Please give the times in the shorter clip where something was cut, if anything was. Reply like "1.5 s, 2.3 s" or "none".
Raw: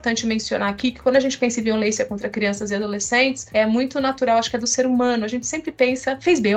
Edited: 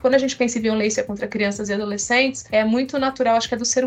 none